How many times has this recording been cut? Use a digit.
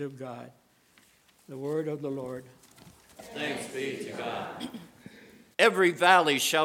1